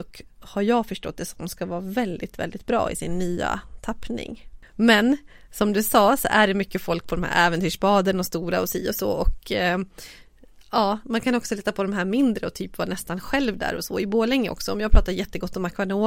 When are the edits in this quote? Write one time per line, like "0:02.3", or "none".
none